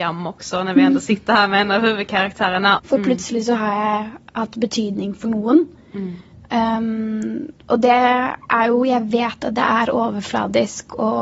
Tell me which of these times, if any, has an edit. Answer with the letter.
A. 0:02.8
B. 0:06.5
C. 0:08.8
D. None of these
A